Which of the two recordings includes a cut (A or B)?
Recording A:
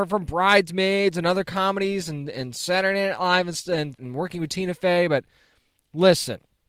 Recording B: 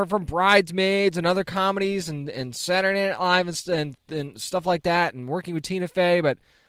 A